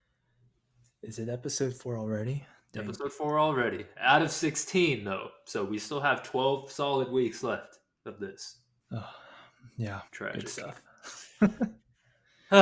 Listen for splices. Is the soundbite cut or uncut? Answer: cut